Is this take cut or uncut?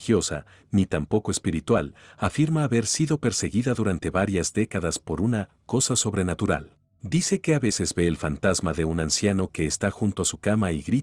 uncut